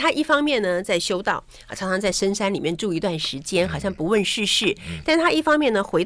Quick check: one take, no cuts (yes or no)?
yes